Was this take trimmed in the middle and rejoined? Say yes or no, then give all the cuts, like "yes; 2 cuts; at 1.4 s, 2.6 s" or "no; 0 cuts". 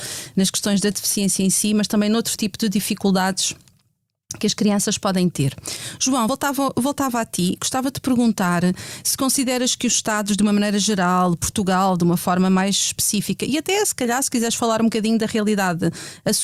no; 0 cuts